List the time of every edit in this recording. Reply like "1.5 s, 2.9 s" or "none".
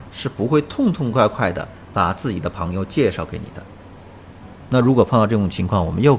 none